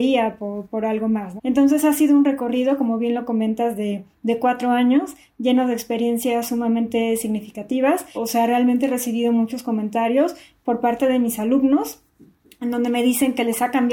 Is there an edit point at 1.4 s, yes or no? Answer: yes